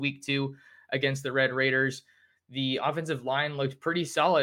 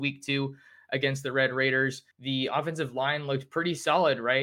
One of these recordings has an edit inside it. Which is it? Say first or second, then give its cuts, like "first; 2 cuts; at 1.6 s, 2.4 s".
second; 1 cut; at 2.1 s